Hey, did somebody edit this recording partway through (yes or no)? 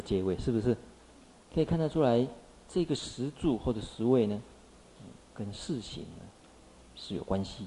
yes